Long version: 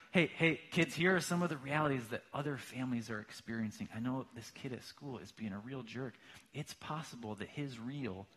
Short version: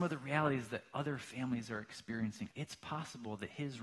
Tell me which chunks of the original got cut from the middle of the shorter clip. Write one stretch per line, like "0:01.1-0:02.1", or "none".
0:03.9-0:06.5